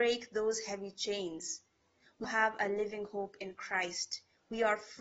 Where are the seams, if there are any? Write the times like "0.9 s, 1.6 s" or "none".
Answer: 2.2 s

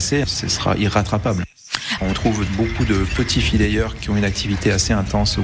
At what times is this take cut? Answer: 2.0 s

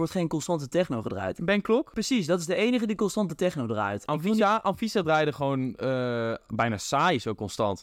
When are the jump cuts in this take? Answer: none

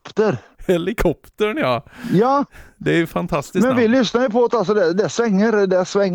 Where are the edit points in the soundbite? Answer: none

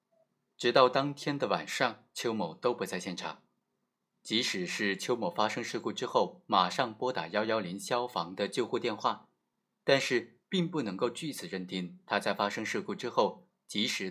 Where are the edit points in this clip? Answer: none

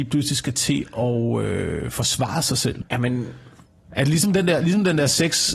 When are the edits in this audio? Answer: 2.8 s

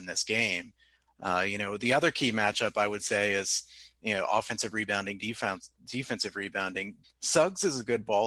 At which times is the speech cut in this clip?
7.0 s

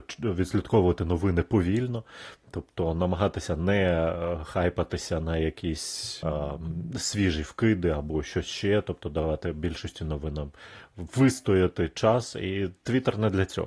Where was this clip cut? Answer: 6.2 s

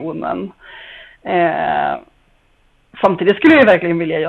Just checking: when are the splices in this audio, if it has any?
1.1 s

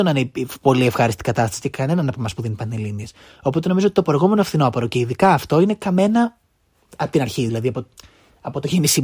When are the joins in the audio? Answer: none

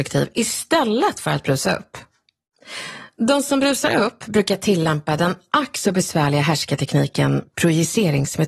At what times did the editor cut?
none

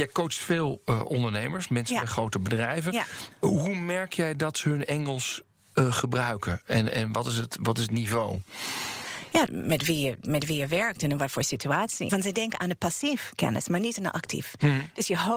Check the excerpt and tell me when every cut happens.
9.5 s, 12.1 s

